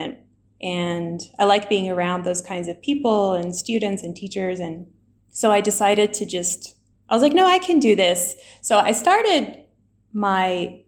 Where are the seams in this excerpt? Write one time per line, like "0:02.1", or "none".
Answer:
none